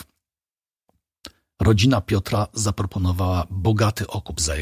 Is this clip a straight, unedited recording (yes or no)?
yes